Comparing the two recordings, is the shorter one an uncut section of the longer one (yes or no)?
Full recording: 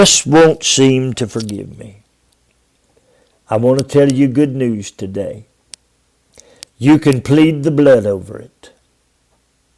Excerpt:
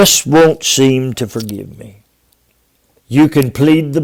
no